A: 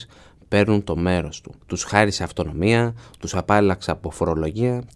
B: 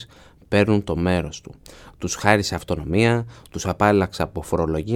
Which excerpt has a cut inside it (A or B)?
A